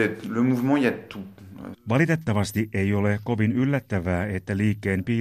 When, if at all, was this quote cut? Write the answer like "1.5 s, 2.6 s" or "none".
1.7 s